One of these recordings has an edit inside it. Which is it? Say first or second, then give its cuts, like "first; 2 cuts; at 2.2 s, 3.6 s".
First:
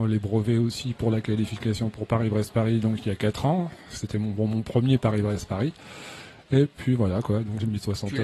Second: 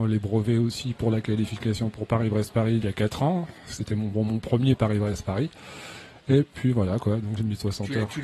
second; 1 cut; at 2.8 s